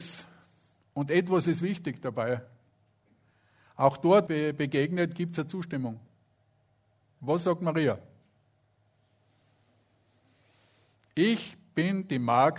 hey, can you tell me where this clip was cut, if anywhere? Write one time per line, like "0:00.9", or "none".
0:04.3
0:07.0